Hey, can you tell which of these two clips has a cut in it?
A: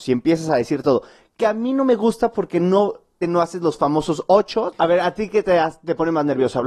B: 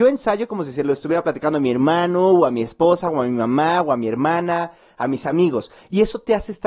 A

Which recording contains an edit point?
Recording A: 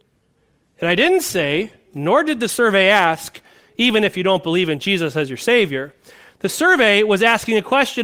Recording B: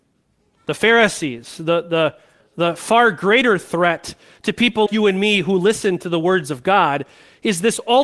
B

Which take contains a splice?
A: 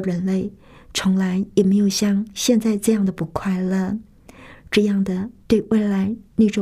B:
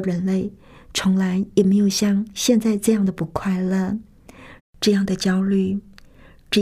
B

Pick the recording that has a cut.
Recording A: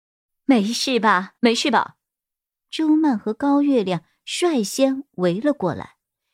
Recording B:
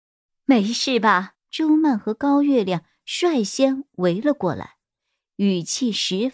B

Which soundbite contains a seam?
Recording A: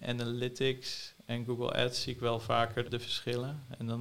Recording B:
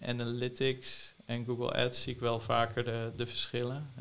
A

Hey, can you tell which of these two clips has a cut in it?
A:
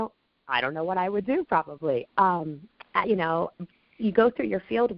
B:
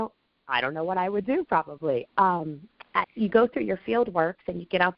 B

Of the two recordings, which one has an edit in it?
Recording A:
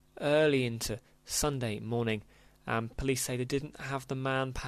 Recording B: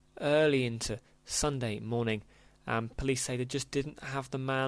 A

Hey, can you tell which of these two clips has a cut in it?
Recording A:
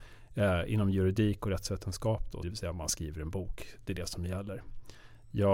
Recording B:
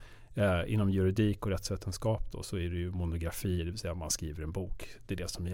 A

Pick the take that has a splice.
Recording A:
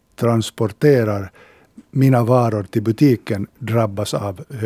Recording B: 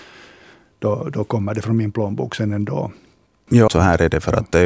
B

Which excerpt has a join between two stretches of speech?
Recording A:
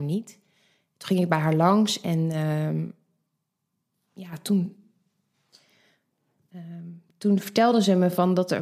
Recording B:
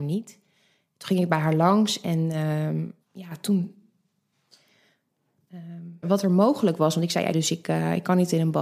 B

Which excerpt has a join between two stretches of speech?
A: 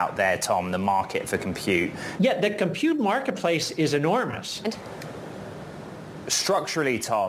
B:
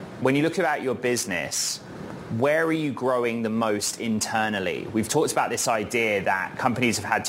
A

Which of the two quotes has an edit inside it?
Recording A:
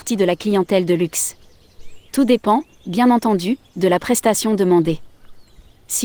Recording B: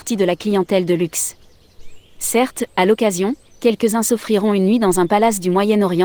A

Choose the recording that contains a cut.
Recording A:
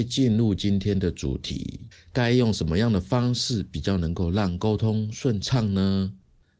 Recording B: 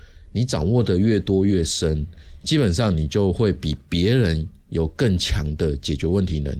A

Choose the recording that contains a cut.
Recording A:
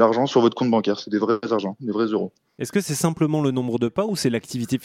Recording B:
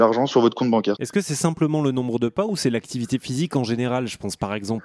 B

